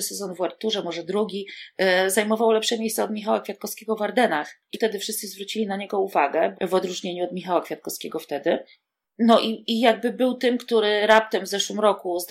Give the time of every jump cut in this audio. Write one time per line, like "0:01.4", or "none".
0:04.7
0:06.5
0:09.7